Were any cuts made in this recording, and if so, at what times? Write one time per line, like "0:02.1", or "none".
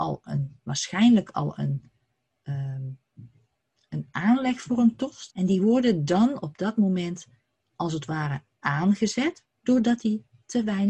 0:05.3
0:09.4